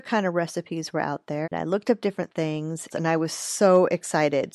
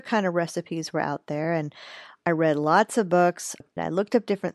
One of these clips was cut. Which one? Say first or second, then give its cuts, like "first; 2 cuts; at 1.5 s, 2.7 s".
first; 2 cuts; at 1.4 s, 2.9 s